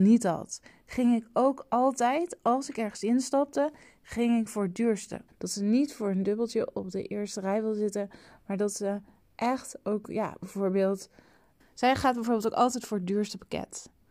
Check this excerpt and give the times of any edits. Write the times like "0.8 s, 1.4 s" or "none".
5.3 s, 11.6 s